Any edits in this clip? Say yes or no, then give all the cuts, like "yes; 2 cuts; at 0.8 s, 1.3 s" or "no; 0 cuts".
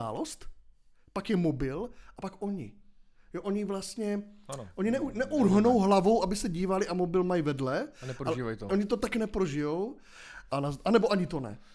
yes; 2 cuts; at 8.7 s, 10.5 s